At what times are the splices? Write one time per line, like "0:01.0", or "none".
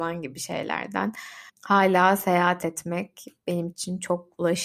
0:01.5